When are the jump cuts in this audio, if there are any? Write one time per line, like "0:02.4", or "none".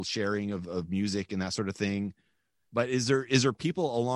0:02.7